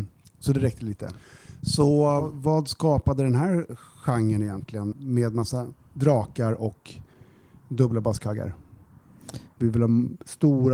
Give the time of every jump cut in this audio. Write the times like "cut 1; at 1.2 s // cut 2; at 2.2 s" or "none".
cut 1; at 4.9 s // cut 2; at 9.6 s